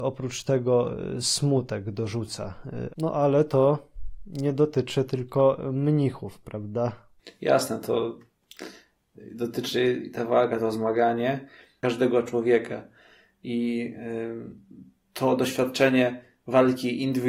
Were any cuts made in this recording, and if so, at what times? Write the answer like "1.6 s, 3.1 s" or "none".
2.9 s